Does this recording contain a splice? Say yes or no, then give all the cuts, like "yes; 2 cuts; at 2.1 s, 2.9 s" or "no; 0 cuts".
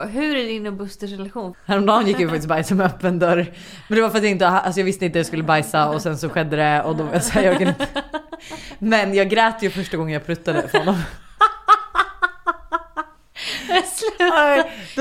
yes; 1 cut; at 1.5 s